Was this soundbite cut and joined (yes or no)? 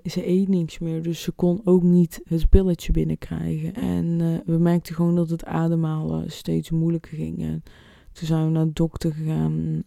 yes